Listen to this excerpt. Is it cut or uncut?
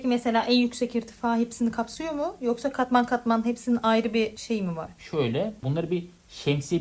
uncut